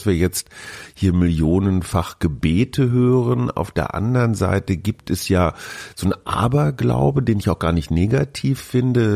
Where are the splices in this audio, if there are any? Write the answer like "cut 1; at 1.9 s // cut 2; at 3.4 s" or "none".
none